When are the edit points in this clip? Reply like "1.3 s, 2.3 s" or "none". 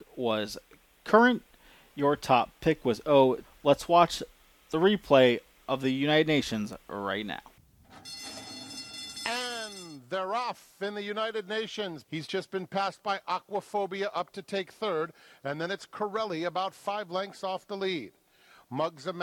3.4 s, 12.0 s